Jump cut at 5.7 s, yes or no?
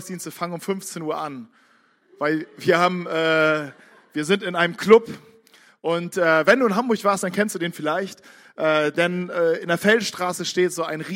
no